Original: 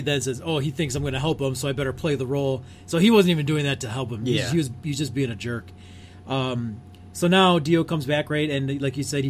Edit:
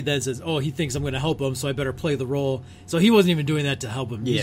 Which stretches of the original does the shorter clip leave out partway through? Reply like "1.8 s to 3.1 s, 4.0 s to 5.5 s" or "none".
none